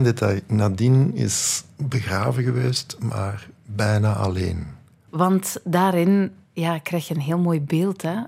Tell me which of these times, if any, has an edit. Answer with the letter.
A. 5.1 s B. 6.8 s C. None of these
A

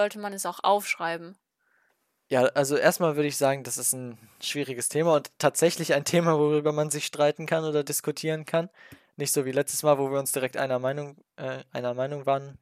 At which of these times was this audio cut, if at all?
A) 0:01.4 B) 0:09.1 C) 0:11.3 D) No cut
D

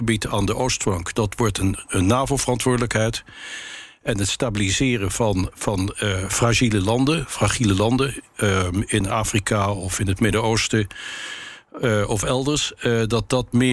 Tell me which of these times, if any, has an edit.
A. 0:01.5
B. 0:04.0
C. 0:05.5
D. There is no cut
C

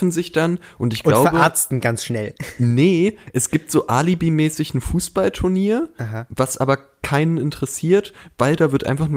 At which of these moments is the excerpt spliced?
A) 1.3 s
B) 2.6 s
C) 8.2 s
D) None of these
D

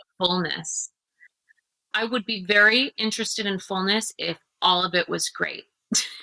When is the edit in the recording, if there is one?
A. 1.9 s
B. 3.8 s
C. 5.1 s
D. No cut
A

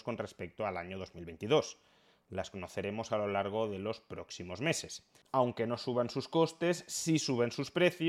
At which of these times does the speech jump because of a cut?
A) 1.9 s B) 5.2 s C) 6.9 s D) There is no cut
B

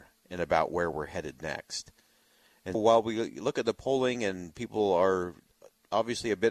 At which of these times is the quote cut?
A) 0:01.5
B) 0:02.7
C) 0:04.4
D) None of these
B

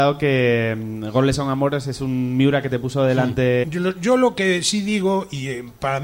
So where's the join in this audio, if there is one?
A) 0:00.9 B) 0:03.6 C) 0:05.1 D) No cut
B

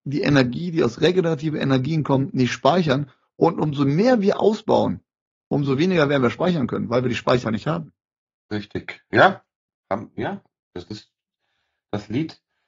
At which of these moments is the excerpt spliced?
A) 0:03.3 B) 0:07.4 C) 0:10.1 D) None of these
B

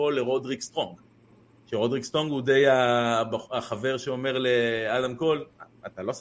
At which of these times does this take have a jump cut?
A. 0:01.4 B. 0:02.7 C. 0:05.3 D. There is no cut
D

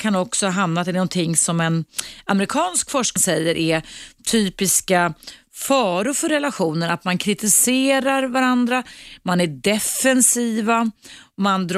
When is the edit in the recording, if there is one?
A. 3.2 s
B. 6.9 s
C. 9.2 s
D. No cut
A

